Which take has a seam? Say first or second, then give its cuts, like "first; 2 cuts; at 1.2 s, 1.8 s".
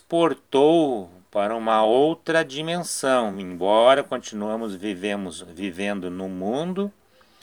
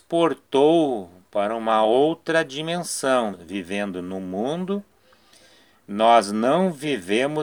second; 1 cut; at 3.3 s